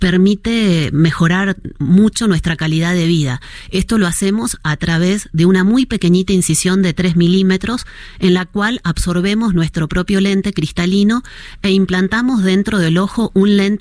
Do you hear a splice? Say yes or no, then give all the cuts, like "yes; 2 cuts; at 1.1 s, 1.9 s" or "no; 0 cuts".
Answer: no; 0 cuts